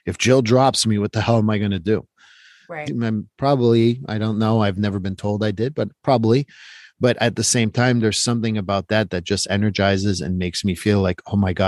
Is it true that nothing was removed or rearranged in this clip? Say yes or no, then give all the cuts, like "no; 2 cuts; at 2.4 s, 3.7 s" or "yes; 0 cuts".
no; 1 cut; at 2.8 s